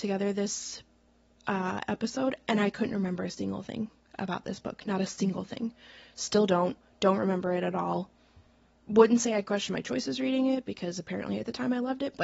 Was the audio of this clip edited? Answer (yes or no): no